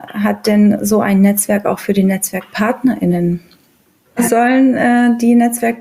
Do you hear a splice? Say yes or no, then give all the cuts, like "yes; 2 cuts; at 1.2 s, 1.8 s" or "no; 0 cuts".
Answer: yes; 1 cut; at 4.2 s